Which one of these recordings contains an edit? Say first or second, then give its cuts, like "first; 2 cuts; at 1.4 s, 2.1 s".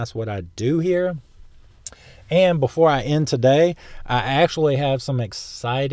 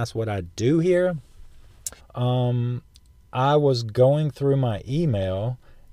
second; 1 cut; at 2.0 s